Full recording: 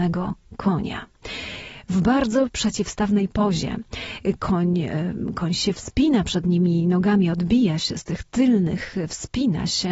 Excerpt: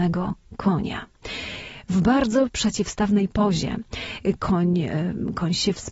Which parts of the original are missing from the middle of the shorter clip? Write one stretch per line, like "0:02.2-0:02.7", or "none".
none